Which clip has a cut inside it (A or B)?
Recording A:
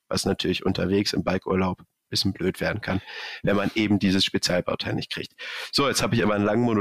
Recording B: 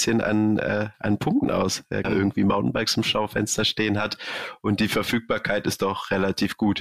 B